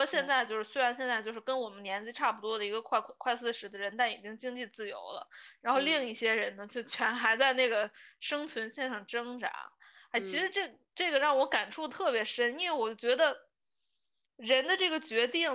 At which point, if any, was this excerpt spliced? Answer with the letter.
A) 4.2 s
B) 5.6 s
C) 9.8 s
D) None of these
D